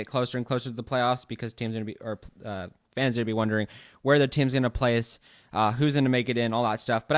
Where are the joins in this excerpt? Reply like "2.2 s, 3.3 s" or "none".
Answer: none